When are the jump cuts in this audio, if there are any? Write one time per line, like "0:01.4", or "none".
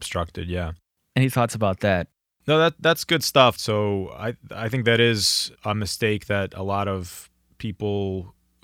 0:03.6
0:05.6